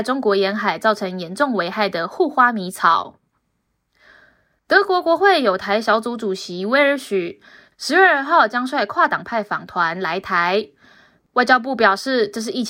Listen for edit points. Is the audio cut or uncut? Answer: uncut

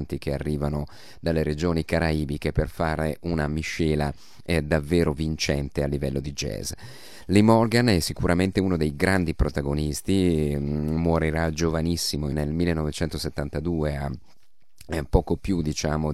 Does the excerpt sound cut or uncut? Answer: uncut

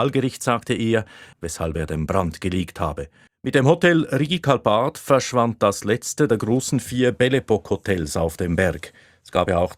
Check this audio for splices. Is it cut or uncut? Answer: cut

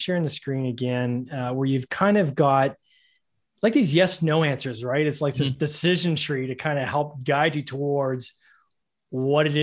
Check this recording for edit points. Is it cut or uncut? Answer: uncut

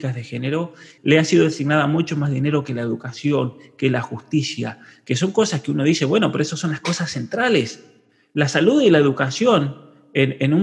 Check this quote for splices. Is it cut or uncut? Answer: cut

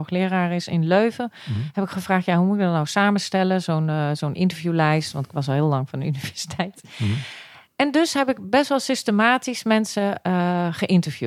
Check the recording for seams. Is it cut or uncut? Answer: uncut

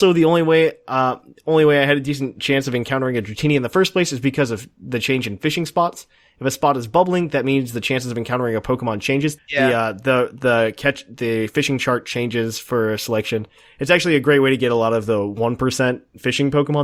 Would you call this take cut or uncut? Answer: cut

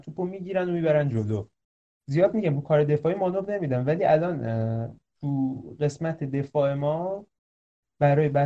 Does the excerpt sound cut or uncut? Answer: uncut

